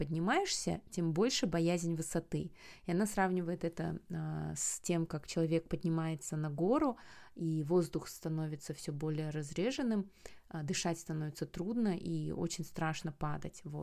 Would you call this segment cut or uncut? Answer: uncut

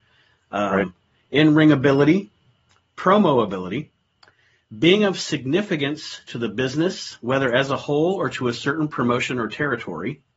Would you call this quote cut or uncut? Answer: uncut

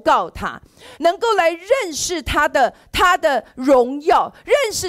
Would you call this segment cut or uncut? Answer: cut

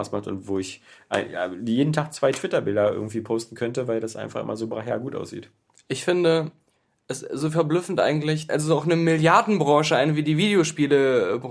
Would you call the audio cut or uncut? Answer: cut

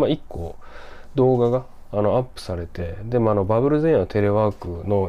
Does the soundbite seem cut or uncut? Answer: uncut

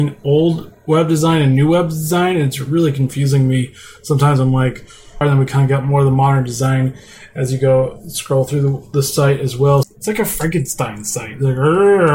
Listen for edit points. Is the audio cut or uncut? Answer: cut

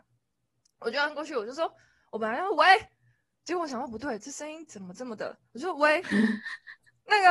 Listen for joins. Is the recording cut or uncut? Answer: uncut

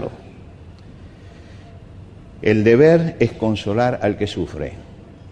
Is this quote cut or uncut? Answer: uncut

